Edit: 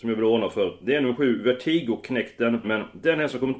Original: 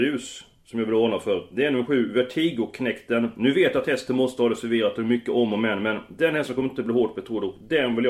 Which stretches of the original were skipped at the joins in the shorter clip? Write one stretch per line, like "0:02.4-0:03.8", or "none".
0:03.3-0:05.8